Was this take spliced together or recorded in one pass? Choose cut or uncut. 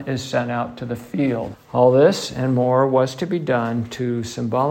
cut